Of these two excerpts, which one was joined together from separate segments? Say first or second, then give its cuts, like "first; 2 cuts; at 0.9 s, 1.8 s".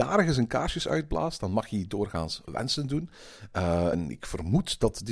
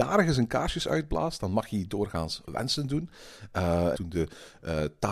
second; 1 cut; at 3.9 s